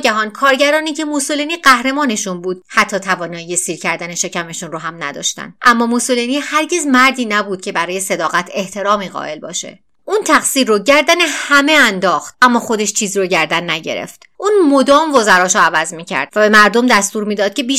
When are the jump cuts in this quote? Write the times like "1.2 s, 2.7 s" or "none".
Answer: 5.6 s

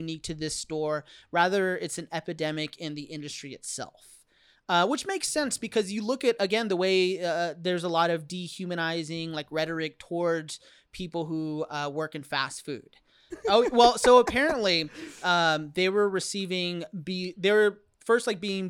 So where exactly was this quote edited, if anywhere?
13.3 s, 15.2 s

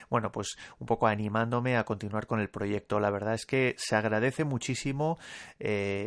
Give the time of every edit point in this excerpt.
none

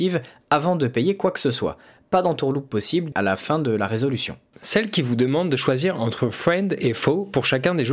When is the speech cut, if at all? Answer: 3.1 s, 4.5 s

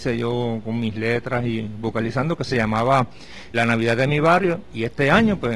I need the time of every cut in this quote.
3.5 s

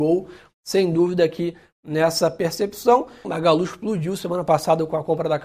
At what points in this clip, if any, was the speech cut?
3.2 s

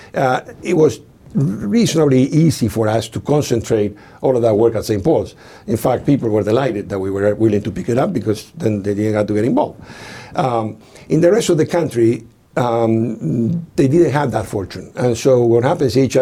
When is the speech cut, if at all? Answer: none

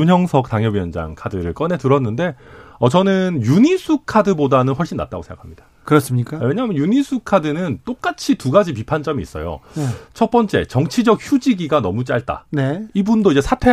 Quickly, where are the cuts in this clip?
none

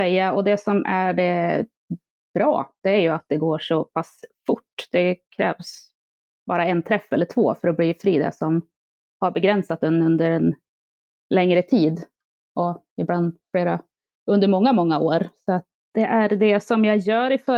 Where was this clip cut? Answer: 15.7 s

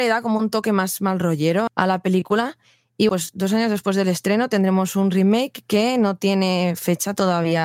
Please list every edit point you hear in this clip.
1.7 s, 3.1 s

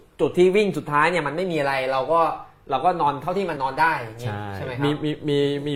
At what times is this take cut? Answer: 3.6 s

